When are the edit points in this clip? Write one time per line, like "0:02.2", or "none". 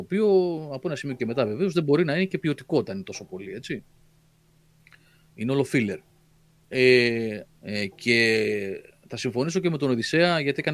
0:07.5